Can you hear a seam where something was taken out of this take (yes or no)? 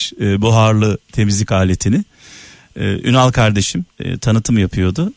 yes